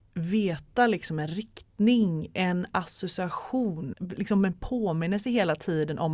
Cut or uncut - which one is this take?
cut